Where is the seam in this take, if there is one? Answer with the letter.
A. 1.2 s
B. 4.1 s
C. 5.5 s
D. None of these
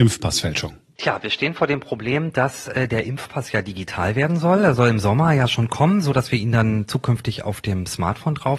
D